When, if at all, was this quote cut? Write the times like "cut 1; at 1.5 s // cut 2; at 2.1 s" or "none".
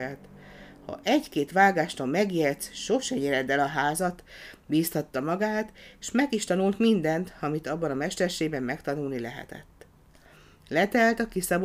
none